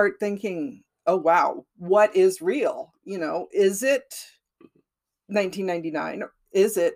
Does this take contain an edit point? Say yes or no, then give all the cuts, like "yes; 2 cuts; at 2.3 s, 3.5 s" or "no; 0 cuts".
no; 0 cuts